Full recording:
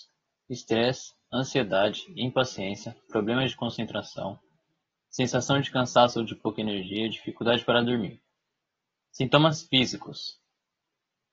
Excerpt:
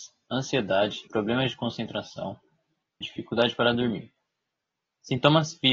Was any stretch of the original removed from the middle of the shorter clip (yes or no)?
yes